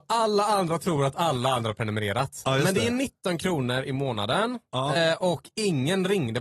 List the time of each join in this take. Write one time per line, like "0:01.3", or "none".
0:04.9